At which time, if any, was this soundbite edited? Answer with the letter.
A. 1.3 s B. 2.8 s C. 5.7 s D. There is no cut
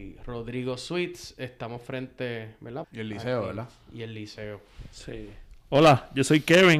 B